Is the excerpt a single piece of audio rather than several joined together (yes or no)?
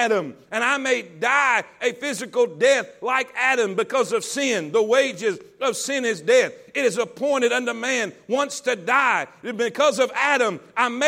yes